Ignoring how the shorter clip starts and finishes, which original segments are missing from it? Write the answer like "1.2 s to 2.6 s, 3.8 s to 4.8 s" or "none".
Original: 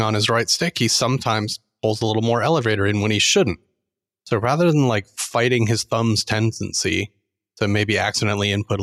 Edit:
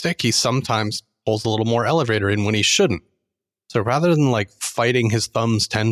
none